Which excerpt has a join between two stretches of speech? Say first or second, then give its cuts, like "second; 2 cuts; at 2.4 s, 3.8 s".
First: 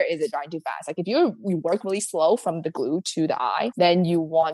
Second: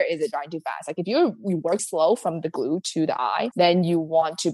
second; 1 cut; at 1.8 s